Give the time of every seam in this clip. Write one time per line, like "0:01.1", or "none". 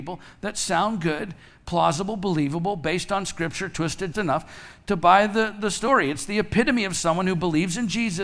0:04.1